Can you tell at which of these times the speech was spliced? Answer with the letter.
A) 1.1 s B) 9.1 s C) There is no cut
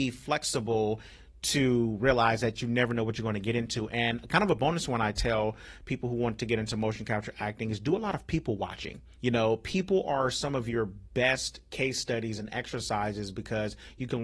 B